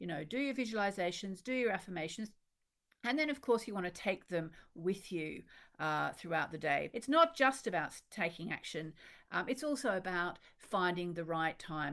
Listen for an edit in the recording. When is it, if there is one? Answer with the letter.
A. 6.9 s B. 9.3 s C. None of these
A